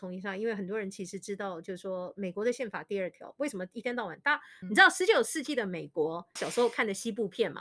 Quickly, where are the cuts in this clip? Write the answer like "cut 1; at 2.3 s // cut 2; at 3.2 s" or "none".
cut 1; at 4.6 s // cut 2; at 6.4 s